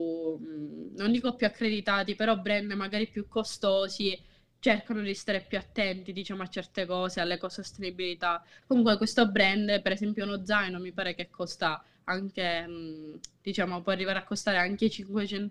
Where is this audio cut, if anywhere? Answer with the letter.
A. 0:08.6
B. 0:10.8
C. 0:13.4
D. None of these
A